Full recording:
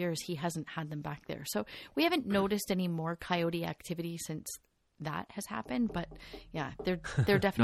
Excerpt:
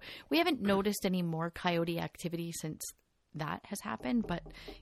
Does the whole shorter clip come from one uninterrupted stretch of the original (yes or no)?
yes